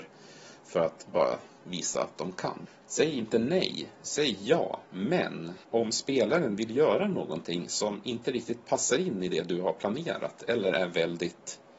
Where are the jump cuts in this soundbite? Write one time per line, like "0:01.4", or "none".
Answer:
0:02.8

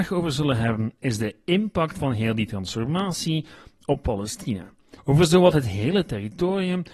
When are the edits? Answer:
0:05.0

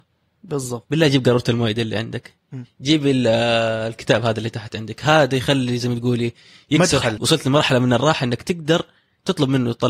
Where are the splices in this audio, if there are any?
0:07.2

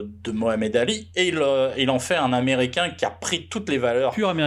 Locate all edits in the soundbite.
none

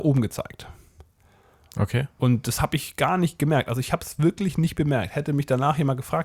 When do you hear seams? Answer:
none

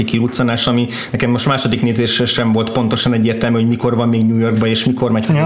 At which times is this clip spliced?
none

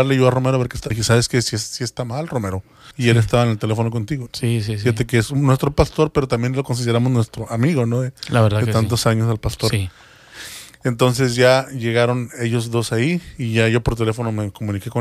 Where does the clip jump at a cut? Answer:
0:00.9
0:02.9
0:04.3

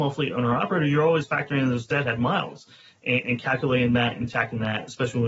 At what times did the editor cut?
0:03.2

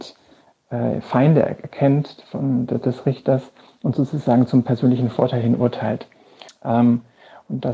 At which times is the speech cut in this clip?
0:06.5

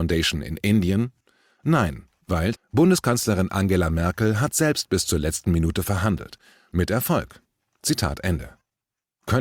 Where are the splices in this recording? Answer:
0:02.6

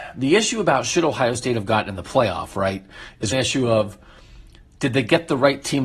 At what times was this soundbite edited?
0:03.3

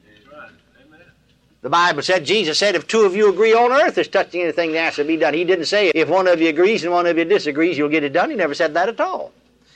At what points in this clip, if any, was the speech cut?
0:05.9

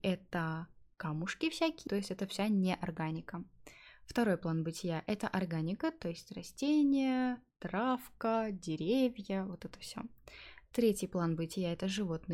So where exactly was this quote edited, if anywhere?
0:01.9

